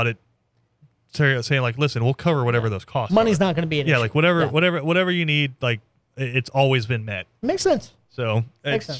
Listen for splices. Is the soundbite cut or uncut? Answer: uncut